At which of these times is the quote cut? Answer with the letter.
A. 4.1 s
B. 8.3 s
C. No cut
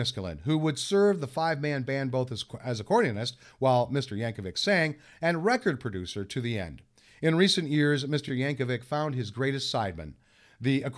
B